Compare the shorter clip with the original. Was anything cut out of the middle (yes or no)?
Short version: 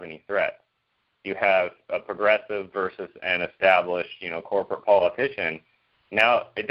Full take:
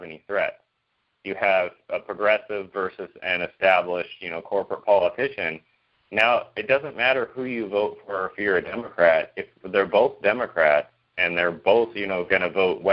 no